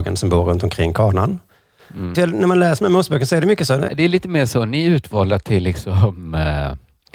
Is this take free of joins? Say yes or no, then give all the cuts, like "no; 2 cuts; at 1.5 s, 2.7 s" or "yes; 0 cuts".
no; 2 cuts; at 2.1 s, 3.9 s